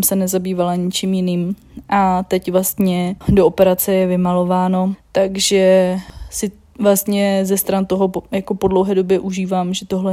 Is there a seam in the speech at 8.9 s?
no; 2 cuts; at 3.2 s, 4.9 s

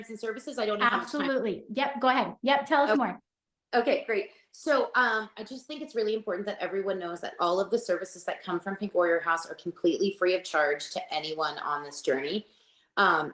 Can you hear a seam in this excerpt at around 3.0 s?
no; 0 cuts

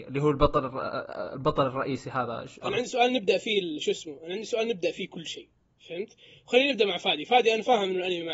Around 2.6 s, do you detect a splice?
yes; 1 cut; at 2.6 s

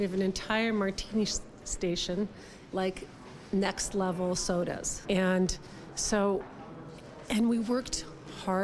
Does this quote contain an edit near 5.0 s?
yes; 2 cuts; at 2.7 s, 5.0 s

